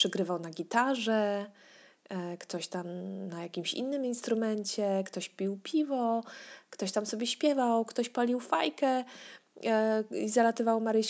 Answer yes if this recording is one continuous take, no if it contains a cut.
yes